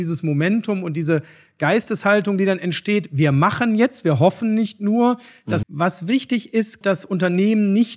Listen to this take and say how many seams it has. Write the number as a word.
two